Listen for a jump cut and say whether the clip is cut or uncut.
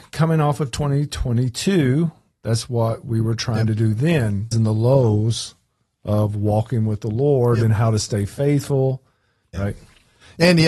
cut